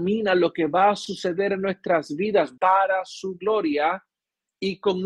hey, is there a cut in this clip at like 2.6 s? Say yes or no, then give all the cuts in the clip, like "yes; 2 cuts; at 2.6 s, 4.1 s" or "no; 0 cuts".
yes; 1 cut; at 2.6 s